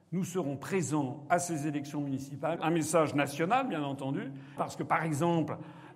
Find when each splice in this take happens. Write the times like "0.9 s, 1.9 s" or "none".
2.6 s, 4.6 s